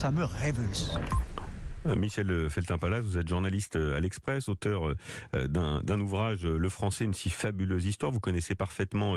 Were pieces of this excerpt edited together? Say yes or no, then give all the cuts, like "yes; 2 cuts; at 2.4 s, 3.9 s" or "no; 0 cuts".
no; 0 cuts